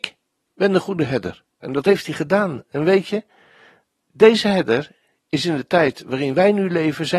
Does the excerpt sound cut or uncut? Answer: cut